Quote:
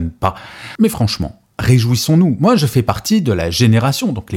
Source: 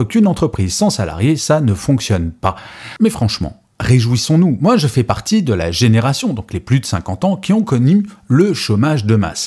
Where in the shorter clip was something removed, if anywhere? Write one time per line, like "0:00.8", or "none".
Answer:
none

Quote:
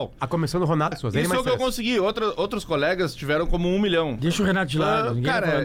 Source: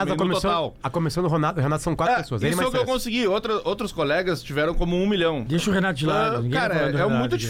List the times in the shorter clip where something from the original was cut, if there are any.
0:00.9

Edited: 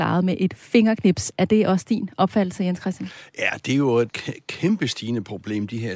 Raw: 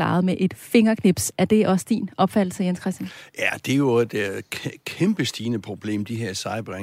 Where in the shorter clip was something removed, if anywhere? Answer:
0:04.1

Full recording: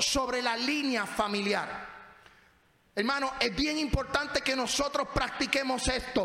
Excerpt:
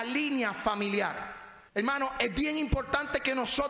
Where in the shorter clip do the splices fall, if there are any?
0:01.7

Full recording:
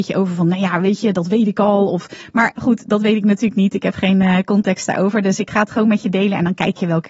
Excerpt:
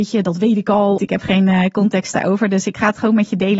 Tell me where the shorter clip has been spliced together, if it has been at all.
0:01.0

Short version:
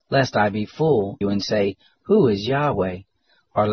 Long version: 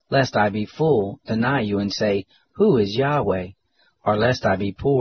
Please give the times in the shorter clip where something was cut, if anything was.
0:01.2

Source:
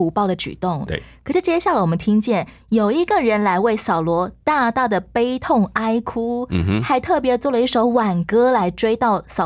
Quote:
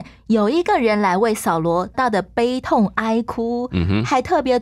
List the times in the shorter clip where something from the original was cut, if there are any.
0:01.9

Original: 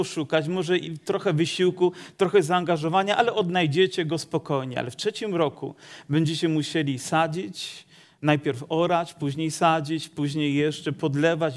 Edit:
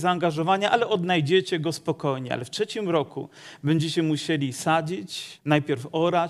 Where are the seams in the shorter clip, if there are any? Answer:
0:05.4

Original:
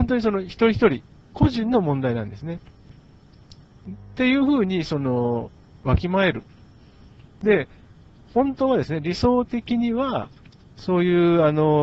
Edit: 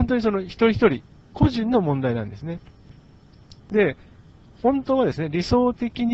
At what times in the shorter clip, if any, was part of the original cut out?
0:03.6

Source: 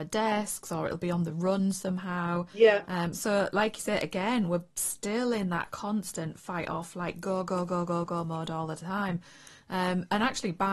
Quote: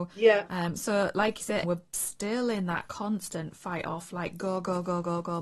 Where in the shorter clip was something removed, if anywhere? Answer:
0:01.6

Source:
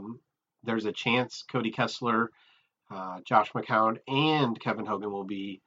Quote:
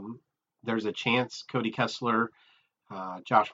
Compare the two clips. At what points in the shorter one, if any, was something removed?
none

